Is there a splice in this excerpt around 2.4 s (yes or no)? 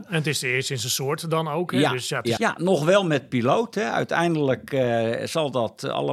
yes